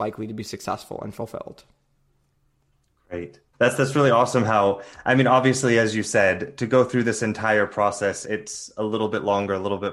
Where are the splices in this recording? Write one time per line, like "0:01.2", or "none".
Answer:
0:03.5
0:08.2